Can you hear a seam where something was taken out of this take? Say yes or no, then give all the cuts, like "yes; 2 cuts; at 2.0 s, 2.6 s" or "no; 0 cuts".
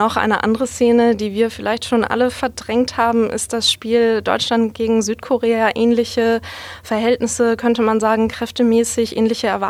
no; 0 cuts